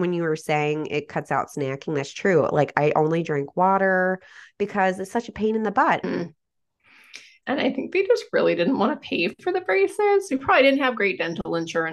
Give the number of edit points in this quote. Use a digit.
2